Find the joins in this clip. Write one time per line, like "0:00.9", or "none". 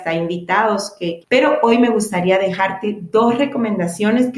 0:01.2